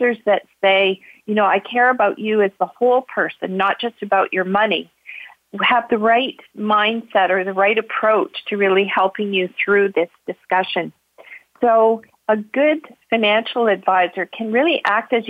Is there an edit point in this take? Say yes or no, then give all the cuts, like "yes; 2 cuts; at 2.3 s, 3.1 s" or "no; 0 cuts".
no; 0 cuts